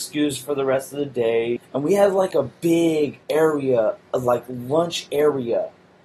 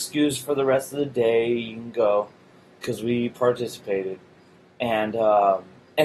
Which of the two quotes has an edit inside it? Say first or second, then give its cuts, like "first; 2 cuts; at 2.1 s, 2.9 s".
first; 2 cuts; at 1.6 s, 3.2 s